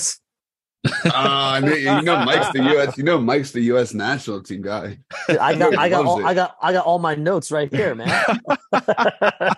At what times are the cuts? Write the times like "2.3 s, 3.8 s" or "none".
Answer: none